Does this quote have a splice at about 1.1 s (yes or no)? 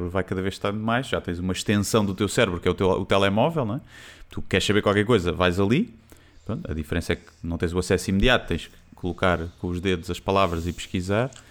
no